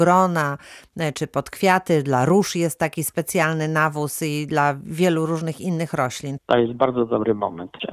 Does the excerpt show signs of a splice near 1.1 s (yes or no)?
yes